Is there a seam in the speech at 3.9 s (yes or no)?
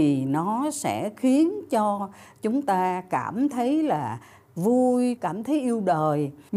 no